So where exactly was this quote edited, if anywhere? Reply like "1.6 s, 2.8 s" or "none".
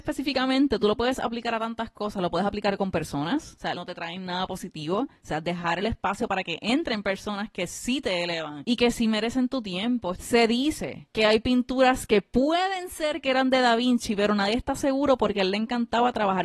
3.7 s, 10.1 s